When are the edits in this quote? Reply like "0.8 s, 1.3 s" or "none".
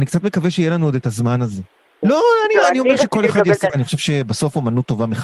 2.0 s, 3.7 s